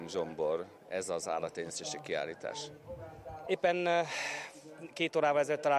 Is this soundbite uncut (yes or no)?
no